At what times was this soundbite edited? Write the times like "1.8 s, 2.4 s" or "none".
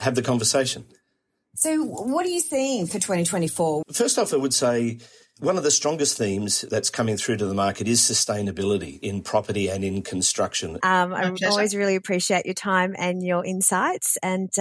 3.8 s, 10.8 s